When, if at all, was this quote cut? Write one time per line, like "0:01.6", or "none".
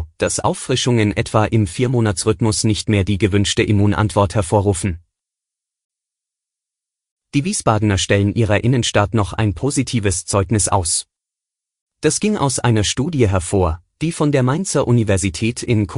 none

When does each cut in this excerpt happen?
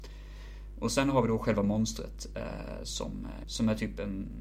0:03.4

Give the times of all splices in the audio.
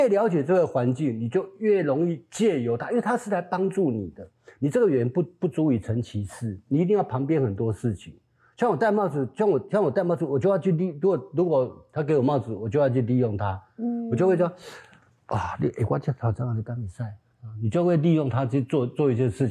none

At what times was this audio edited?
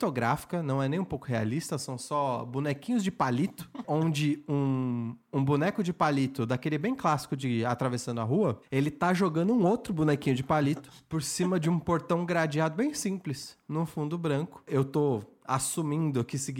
0:03.8
0:14.7

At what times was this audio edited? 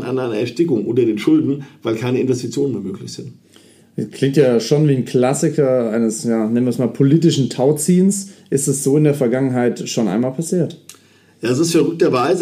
none

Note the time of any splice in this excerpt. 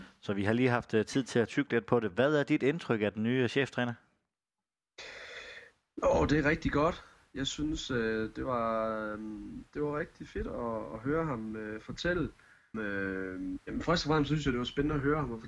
0:12.7

